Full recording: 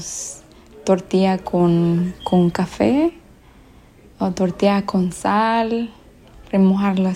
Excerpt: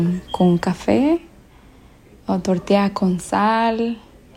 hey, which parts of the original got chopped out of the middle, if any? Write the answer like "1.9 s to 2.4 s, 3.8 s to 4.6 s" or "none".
none